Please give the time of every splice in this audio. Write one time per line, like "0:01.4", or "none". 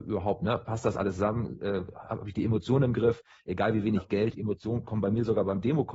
none